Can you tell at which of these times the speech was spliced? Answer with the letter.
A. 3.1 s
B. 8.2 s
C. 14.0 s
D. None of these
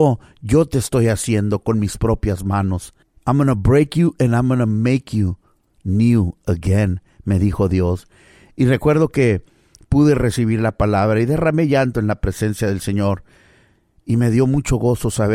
D